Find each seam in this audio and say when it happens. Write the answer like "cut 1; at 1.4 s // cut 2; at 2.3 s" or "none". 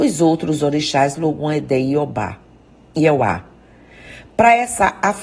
none